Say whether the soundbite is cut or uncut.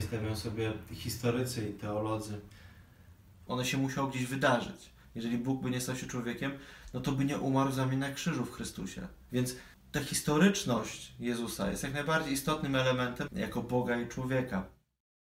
cut